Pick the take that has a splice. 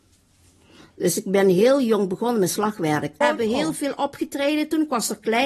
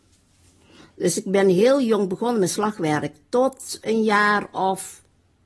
first; 1 cut; at 3.2 s

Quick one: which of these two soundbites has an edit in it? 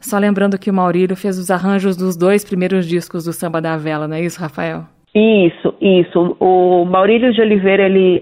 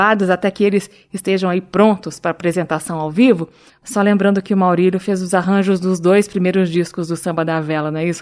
second; 1 cut; at 3.7 s

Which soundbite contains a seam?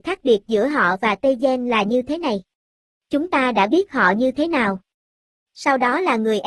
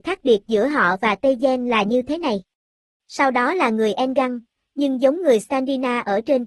second; 2 cuts; at 3.0 s, 4.6 s

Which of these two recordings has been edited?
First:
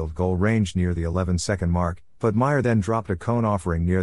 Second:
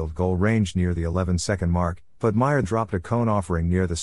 second; 1 cut; at 2.6 s

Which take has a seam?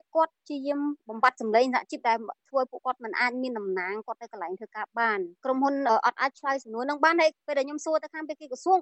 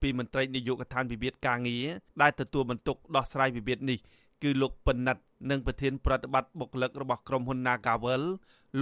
second; 1 cut; at 2.1 s

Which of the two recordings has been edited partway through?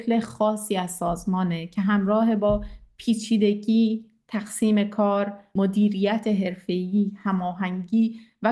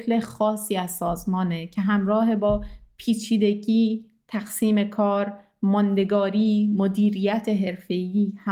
first; 1 cut; at 5.6 s

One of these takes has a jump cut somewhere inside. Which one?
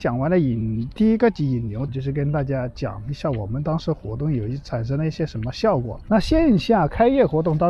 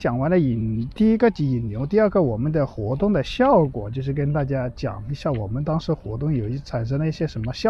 first; 2 cuts; at 1.9 s, 6.1 s

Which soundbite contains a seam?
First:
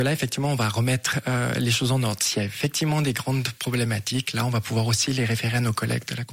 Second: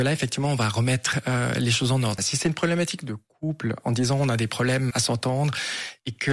second; 2 cuts; at 2.2 s, 4.9 s

